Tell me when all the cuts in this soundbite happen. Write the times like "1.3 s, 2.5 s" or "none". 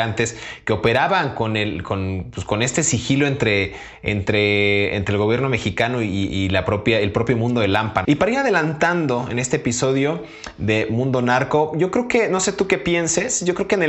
8.0 s